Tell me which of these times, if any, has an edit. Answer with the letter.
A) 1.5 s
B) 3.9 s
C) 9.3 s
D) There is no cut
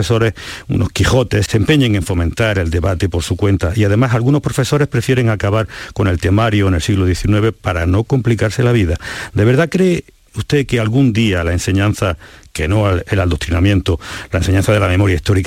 A